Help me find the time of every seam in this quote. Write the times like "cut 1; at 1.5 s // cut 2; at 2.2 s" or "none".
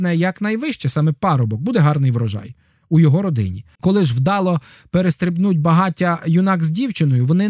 cut 1; at 3.8 s